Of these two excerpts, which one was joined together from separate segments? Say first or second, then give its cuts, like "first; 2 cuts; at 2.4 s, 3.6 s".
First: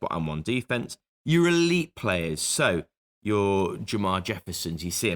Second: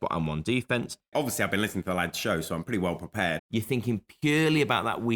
second; 2 cuts; at 1.1 s, 3.4 s